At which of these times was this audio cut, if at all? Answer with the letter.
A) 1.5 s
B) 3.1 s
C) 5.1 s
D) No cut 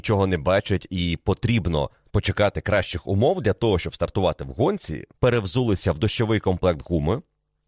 C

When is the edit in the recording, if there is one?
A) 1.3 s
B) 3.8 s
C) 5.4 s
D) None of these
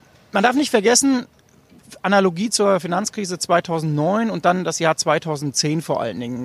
D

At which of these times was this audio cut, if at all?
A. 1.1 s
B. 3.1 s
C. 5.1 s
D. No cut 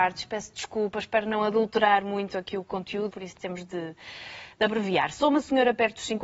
B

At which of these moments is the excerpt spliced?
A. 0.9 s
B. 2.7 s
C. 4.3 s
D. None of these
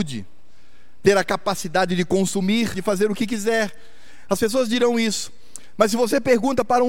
B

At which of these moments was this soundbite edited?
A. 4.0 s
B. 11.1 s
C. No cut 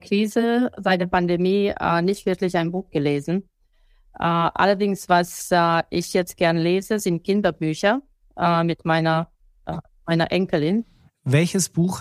B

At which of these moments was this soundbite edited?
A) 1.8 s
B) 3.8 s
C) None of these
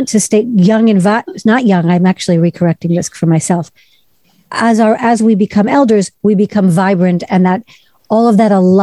C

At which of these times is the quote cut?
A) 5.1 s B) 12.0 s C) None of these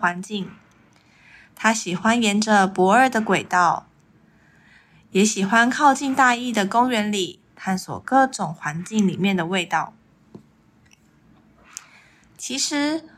C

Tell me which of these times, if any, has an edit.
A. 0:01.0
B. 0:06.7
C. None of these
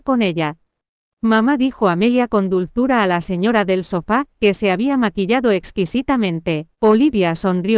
B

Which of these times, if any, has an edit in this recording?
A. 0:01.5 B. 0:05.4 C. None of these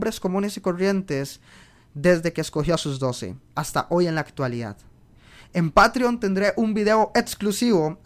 C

